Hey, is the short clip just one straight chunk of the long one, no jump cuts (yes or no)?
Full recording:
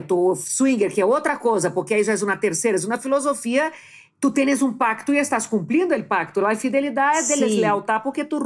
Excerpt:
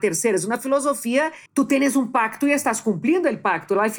no